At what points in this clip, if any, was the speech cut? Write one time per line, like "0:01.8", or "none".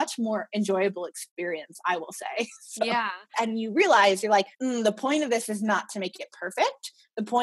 0:03.3
0:04.5